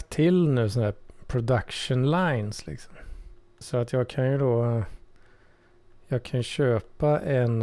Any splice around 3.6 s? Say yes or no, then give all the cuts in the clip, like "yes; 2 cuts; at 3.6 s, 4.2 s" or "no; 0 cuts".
yes; 1 cut; at 3.6 s